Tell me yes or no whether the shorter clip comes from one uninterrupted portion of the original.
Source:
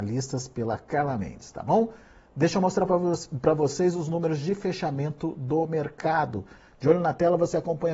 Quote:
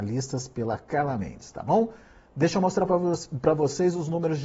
yes